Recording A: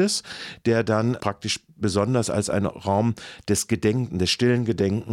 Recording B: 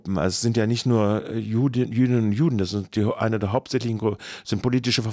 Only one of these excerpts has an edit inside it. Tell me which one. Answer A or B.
A